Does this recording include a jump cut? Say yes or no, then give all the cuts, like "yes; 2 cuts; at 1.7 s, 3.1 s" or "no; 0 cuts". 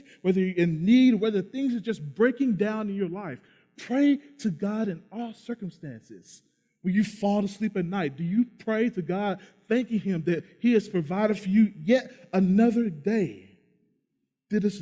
no; 0 cuts